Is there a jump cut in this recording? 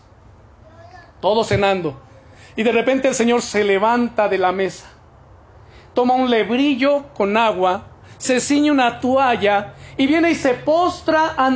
no; 0 cuts

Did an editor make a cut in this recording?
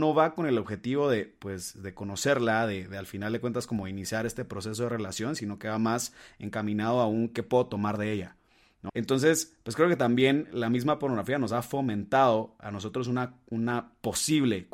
yes; 1 cut; at 8.9 s

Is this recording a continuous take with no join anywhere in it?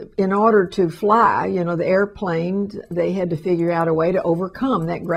yes; 0 cuts

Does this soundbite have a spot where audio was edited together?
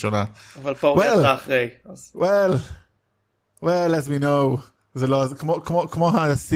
no; 0 cuts

